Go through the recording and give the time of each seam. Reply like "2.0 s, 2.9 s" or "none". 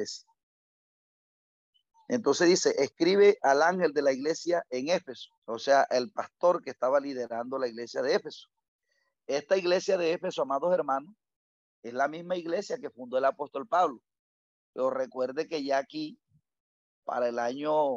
5.4 s